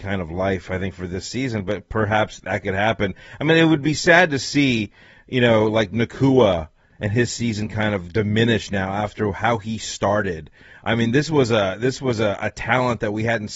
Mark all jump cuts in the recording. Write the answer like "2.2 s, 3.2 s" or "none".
none